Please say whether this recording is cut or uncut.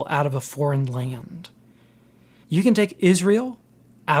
cut